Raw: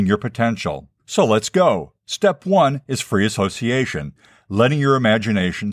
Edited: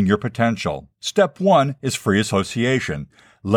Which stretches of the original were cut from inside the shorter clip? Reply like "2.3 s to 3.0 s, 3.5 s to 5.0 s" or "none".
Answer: 0.9 s to 2.0 s